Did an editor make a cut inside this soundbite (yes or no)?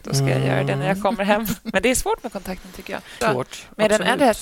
yes